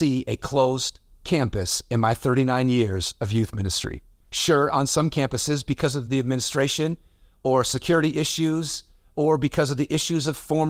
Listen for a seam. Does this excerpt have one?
yes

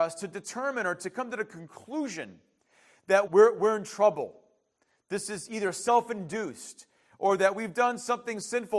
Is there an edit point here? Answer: yes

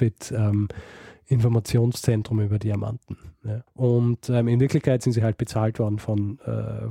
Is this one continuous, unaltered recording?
no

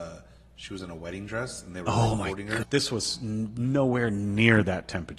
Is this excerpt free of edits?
no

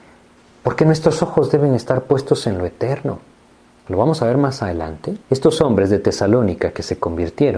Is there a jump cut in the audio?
yes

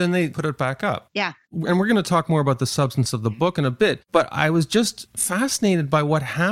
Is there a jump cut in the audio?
no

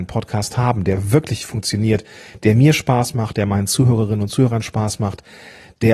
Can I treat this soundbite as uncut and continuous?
yes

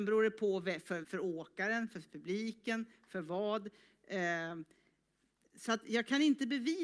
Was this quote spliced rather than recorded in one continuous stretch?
yes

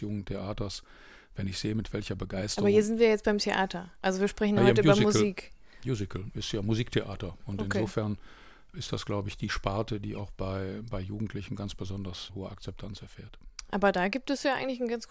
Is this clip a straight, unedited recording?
yes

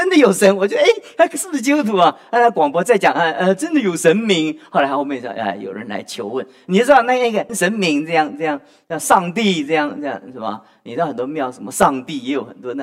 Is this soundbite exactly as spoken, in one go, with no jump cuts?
no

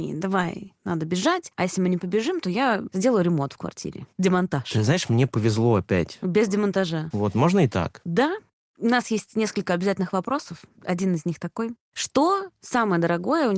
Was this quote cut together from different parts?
yes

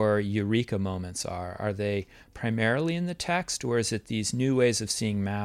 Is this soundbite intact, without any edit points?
yes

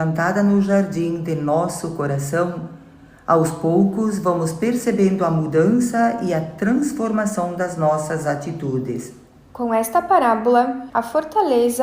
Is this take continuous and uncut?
no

